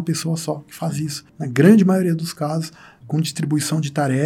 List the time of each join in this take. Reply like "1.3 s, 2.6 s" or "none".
1.3 s, 3.0 s